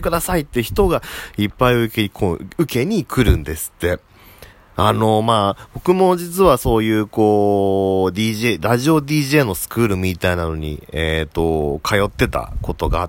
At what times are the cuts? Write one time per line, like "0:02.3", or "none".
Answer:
0:04.5